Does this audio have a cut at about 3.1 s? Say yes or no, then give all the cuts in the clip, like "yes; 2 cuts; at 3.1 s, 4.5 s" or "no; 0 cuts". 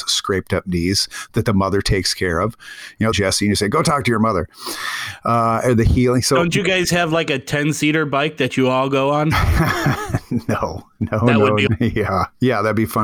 yes; 2 cuts; at 3.1 s, 11.7 s